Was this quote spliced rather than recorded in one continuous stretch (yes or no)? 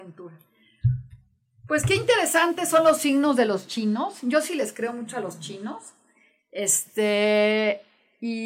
no